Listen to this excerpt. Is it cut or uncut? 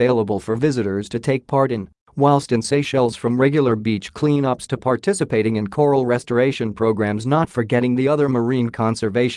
uncut